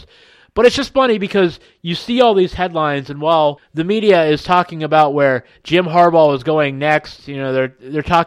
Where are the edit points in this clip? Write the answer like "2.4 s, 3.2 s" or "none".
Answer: 3.6 s